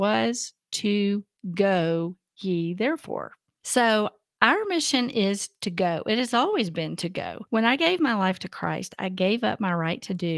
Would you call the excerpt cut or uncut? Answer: uncut